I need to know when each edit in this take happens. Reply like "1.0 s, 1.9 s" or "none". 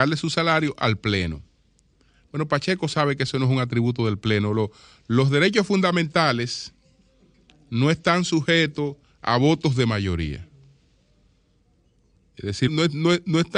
12.7 s